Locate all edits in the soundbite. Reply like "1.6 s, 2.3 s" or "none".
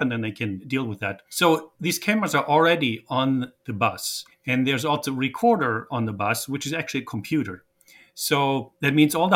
none

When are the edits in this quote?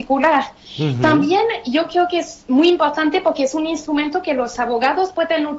none

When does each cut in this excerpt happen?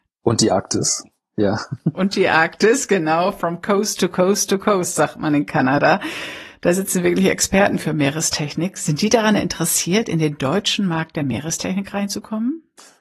none

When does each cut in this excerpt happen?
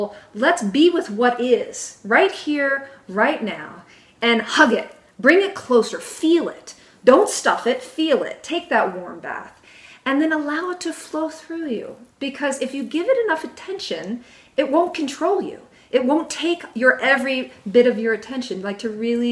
none

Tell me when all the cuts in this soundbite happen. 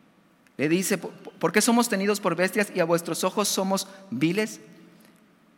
1.0 s

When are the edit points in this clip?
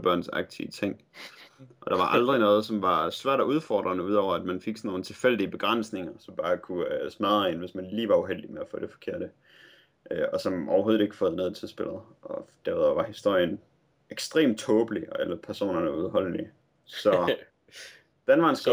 none

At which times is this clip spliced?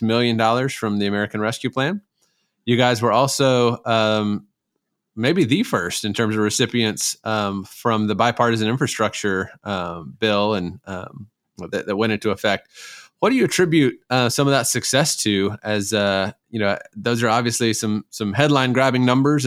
none

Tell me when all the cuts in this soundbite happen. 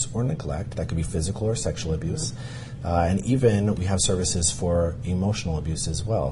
none

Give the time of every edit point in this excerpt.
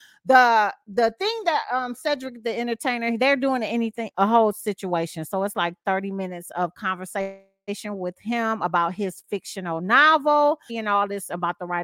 4.1 s, 10.7 s

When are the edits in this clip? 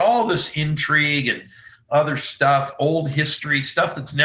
none

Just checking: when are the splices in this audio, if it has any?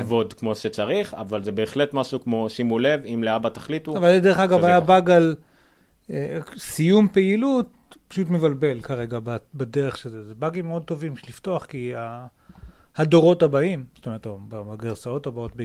none

